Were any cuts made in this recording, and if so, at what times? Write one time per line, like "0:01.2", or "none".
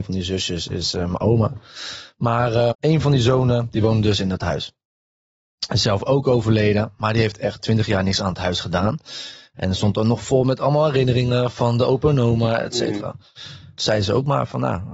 0:02.7
0:13.8